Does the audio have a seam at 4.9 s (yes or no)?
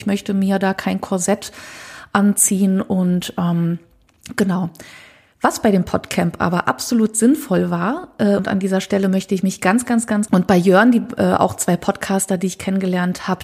no